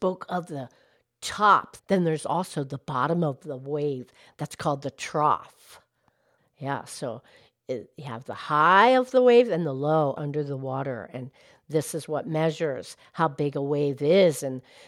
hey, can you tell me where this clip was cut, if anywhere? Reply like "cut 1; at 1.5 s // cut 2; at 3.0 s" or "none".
cut 1; at 1.8 s // cut 2; at 6.4 s // cut 3; at 10.2 s

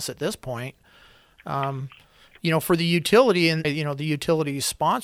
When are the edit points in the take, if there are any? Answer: cut 1; at 3.6 s

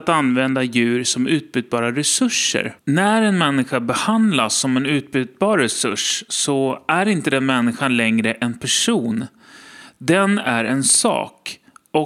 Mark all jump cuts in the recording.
none

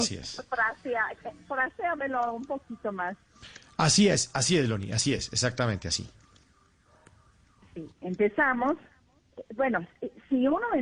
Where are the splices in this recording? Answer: cut 1; at 8.0 s

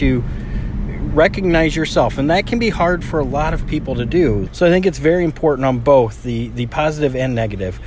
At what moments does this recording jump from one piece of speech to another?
cut 1; at 4.5 s

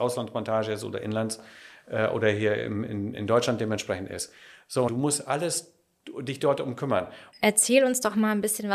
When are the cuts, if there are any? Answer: cut 1; at 4.9 s // cut 2; at 7.3 s

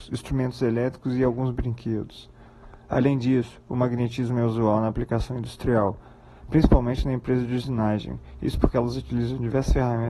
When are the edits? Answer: none

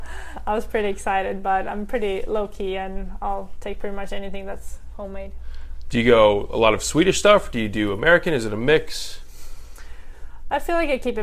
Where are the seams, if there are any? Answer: none

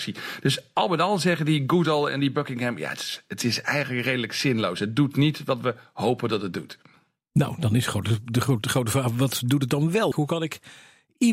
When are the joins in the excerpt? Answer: cut 1; at 10.1 s

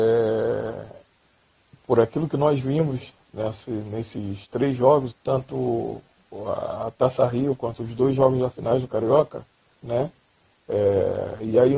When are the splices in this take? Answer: cut 1; at 5.1 s // cut 2; at 9.8 s

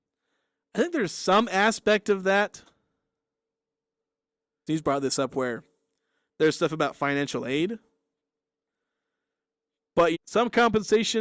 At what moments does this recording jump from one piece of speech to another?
cut 1; at 4.7 s // cut 2; at 10.1 s

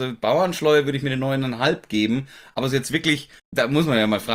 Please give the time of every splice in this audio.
cut 1; at 3.4 s

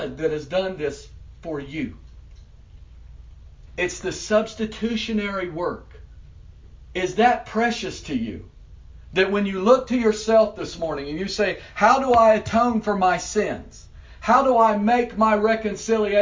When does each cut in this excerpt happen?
cut 1; at 3.7 s

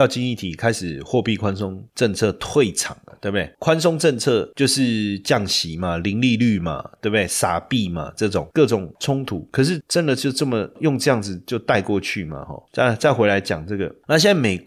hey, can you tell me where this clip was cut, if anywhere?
cut 1; at 8.5 s

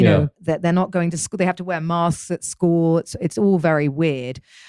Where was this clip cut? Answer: none

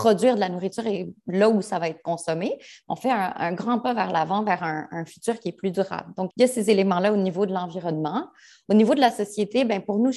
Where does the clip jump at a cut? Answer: cut 1; at 6.3 s

